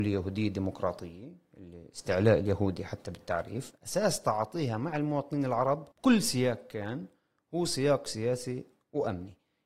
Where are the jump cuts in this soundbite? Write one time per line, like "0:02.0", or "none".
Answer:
0:05.9

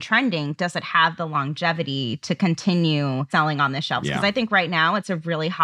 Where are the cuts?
none

